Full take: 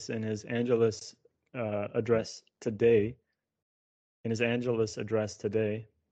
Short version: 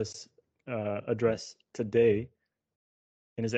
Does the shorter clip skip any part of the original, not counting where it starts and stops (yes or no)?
no